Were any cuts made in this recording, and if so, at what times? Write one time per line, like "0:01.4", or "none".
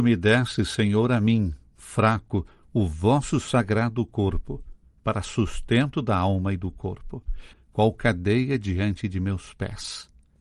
0:07.5